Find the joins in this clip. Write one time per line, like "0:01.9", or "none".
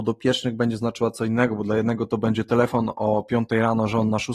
none